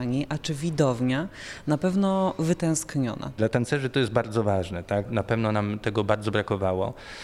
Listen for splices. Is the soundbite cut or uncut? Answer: cut